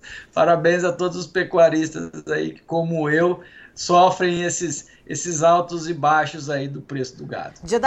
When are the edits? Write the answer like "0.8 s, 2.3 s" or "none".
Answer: none